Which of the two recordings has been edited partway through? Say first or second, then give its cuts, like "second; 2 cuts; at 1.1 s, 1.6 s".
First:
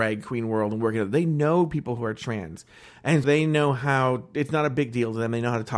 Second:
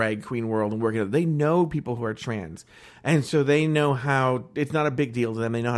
first; 1 cut; at 3.2 s